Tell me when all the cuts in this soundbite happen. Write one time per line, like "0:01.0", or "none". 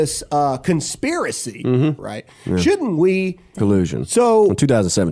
0:02.0
0:03.5